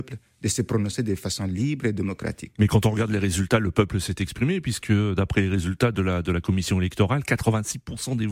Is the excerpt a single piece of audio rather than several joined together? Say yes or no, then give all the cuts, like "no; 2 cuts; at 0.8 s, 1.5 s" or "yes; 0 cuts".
yes; 0 cuts